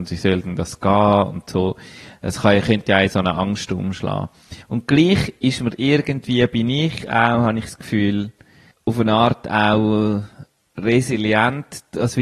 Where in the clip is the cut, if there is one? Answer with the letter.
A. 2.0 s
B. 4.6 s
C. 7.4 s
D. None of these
B